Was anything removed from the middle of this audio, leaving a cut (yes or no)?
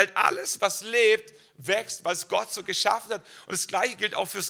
no